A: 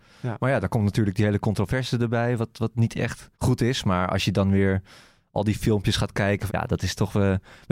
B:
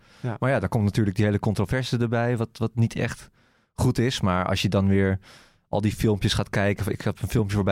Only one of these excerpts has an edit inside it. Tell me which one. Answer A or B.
A